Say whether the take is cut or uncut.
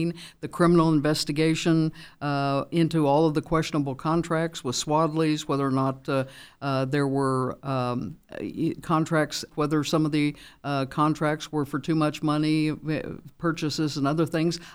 cut